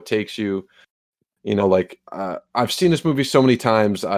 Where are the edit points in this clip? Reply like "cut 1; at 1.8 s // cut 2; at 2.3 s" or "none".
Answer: cut 1; at 2.5 s

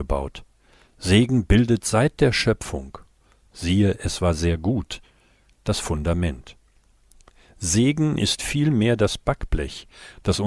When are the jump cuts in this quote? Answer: none

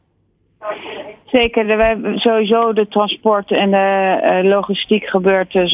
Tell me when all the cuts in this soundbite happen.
none

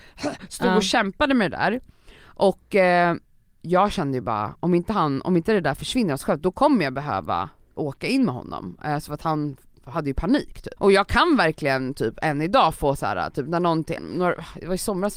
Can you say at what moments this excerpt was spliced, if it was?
cut 1; at 7.8 s // cut 2; at 10.8 s // cut 3; at 14.0 s

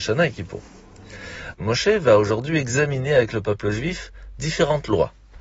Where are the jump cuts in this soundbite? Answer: cut 1; at 1.5 s

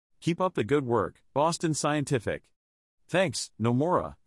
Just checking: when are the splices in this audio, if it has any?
cut 1; at 2.9 s

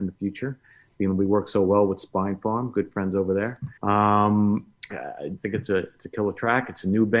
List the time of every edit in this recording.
cut 1; at 3.8 s // cut 2; at 4.9 s

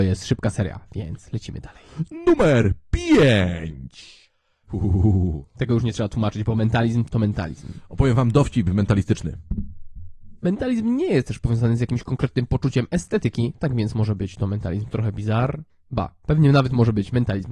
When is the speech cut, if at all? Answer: cut 1; at 4.7 s // cut 2; at 10.4 s // cut 3; at 15.7 s

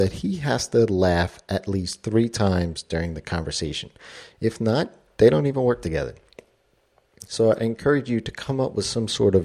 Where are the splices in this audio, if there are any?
none

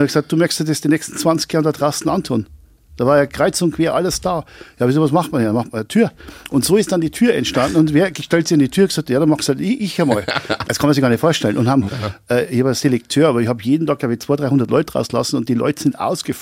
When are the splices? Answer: cut 1; at 10.6 s // cut 2; at 11.9 s

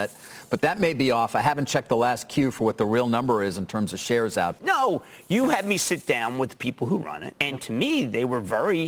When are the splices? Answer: cut 1; at 4.6 s // cut 2; at 7.3 s

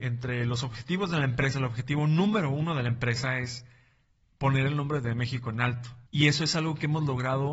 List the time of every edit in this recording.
cut 1; at 6.1 s

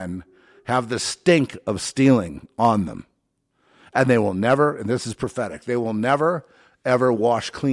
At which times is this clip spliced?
none

